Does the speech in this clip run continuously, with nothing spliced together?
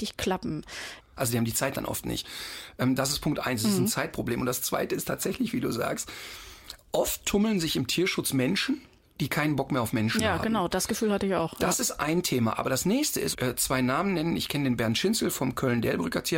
no; 2 cuts; at 1.0 s, 13.3 s

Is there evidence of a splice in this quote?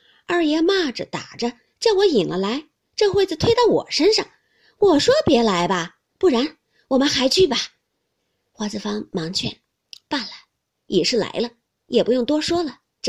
no; 0 cuts

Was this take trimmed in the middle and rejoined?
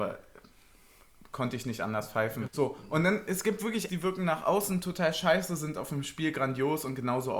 yes; 2 cuts; at 2.5 s, 3.9 s

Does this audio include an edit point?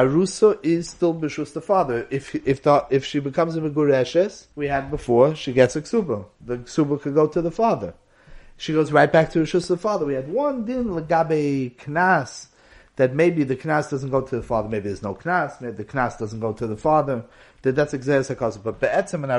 yes; 1 cut; at 4.5 s

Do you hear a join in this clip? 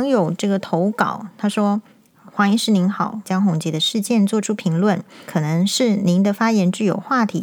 yes; 3 cuts; at 1.9 s, 3.2 s, 5.3 s

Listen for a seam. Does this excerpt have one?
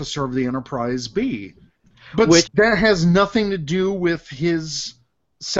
yes; 1 cut; at 2.4 s

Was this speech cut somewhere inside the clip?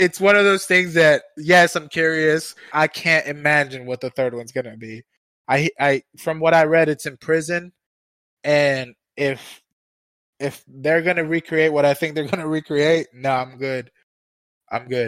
yes; 1 cut; at 2.7 s

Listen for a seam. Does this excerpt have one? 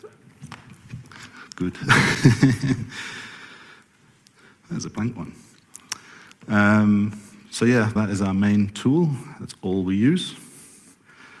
yes; 1 cut; at 8.0 s

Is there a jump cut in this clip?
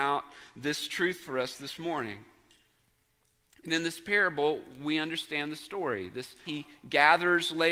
yes; 1 cut; at 6.4 s

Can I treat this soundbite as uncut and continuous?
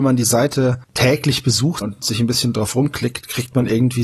no; 1 cut; at 1.8 s

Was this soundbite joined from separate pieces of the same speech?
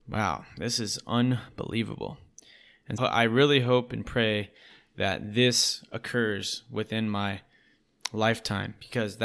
yes; 1 cut; at 3.0 s

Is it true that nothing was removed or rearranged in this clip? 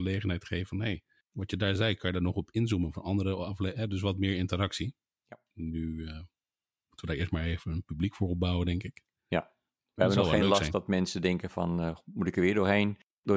yes; 0 cuts

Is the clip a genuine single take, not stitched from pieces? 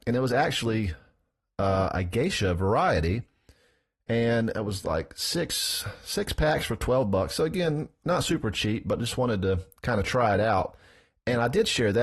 yes; 0 cuts

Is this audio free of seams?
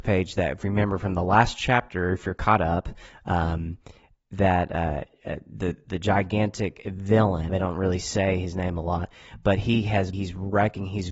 no; 2 cuts; at 7.5 s, 10.1 s

